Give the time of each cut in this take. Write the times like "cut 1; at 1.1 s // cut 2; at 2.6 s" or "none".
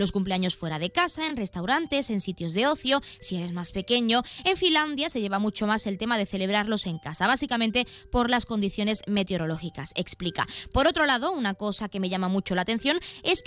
none